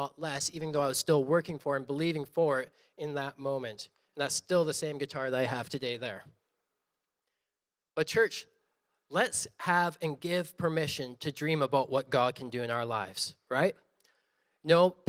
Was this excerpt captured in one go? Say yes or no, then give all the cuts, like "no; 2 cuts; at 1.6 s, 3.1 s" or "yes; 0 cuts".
yes; 0 cuts